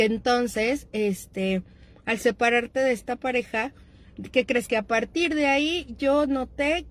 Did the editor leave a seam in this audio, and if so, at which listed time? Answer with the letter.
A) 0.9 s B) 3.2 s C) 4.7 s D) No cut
D